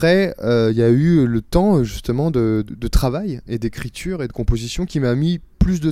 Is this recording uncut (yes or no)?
no